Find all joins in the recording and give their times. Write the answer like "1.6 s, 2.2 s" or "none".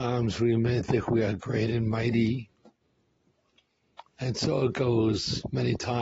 4.0 s